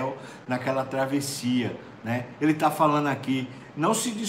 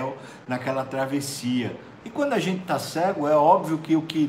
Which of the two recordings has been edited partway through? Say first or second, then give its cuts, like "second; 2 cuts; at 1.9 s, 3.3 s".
second; 1 cut; at 2.0 s